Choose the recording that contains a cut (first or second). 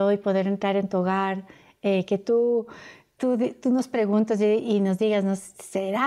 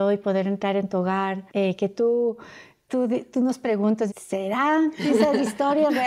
second